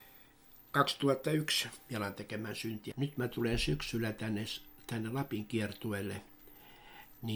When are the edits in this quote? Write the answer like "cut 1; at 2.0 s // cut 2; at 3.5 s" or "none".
cut 1; at 2.9 s